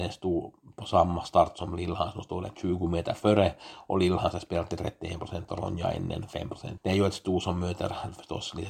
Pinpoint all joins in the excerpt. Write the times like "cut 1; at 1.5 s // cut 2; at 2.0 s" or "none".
cut 1; at 6.8 s